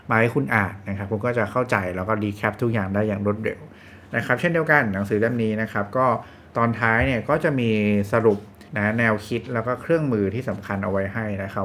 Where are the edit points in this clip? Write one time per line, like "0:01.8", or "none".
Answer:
0:08.7